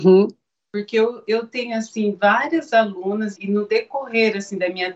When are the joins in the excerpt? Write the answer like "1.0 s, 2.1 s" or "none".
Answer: 3.4 s